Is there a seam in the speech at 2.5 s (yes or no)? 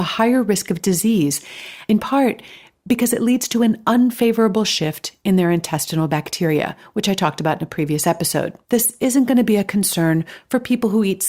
no